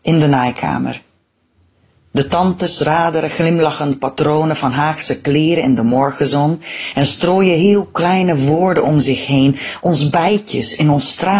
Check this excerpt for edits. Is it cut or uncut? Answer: uncut